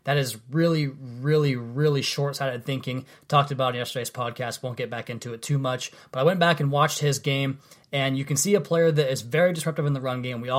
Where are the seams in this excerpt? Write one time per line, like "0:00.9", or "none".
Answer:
none